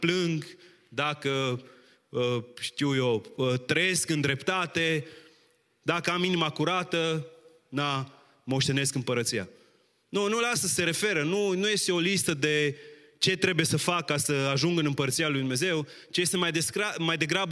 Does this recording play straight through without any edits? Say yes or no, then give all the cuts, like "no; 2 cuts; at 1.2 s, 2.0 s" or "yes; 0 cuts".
yes; 0 cuts